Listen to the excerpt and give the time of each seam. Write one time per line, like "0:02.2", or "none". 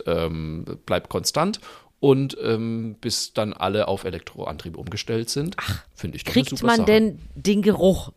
0:05.9